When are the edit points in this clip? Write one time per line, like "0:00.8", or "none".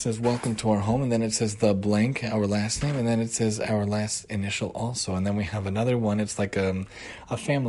none